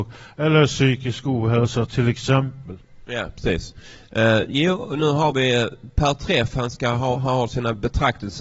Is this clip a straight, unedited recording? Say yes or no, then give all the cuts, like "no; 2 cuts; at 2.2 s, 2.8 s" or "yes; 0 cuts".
yes; 0 cuts